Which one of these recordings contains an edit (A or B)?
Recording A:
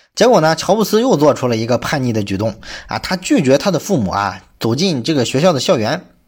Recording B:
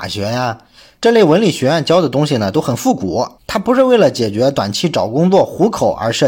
B